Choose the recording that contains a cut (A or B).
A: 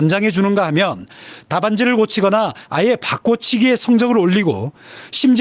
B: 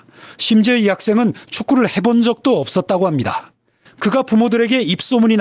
B